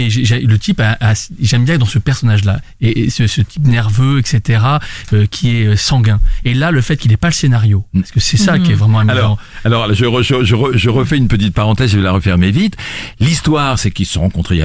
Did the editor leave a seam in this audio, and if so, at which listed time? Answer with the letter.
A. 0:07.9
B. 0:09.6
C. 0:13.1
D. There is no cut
A